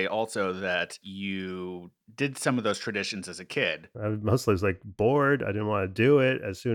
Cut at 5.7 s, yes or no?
no